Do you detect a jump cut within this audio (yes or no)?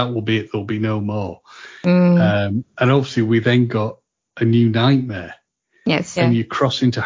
yes